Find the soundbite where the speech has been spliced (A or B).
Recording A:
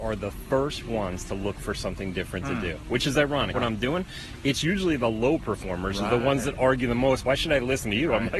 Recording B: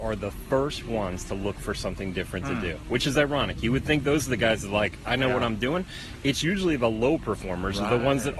A